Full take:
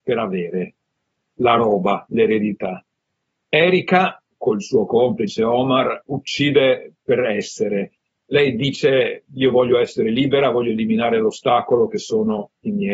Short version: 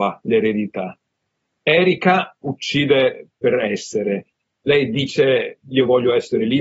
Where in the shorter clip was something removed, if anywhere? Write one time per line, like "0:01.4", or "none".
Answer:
0:02.4